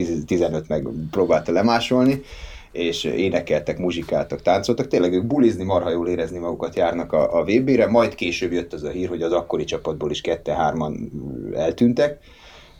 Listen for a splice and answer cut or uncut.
uncut